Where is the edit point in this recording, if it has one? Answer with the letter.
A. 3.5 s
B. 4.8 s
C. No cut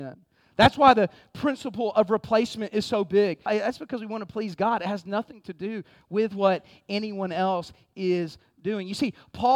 A